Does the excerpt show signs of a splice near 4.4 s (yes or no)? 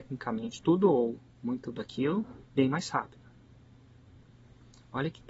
no